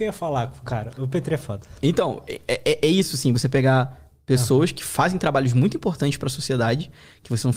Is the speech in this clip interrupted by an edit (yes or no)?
no